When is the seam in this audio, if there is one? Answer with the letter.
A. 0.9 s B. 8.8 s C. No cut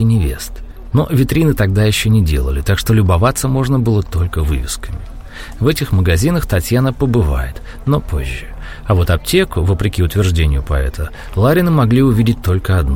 A